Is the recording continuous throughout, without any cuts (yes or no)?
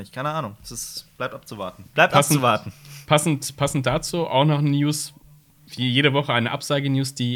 no